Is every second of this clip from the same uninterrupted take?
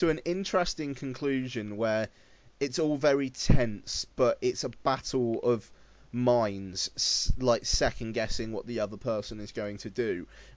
yes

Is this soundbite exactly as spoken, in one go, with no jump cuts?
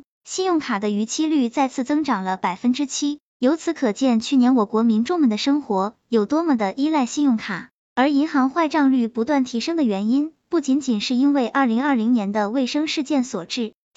yes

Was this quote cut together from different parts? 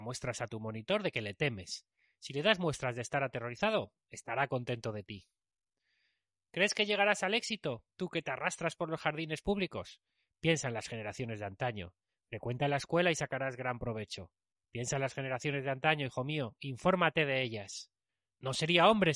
no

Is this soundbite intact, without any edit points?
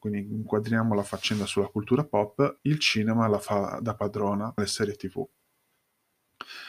no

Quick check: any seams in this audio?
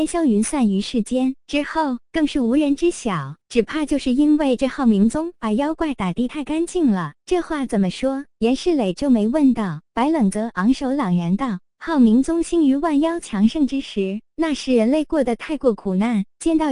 no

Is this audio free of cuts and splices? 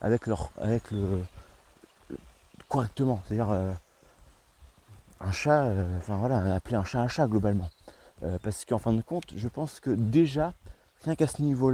yes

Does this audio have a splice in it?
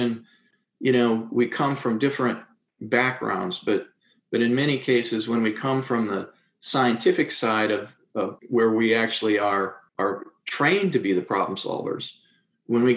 yes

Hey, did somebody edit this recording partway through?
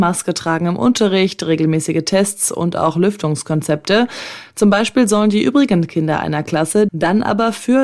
yes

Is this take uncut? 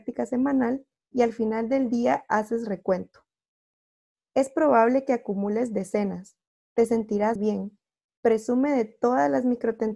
no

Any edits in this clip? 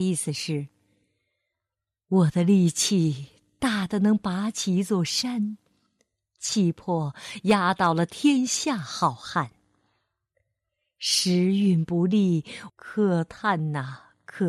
yes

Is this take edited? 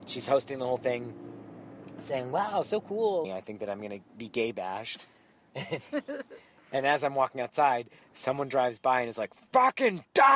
yes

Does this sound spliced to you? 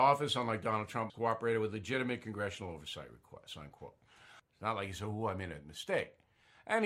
yes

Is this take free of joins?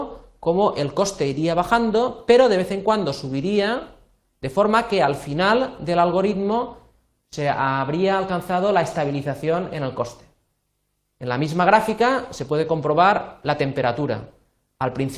yes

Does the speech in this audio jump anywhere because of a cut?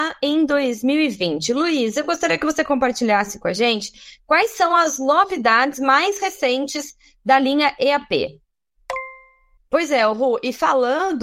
yes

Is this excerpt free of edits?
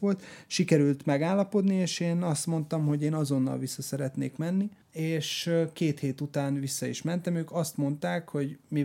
no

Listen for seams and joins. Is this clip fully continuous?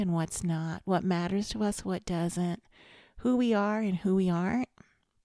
yes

